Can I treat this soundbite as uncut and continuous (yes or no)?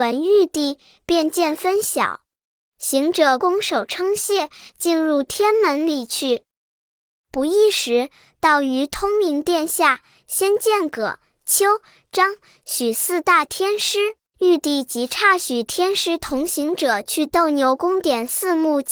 no